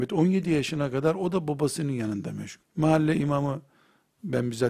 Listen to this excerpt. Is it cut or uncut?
cut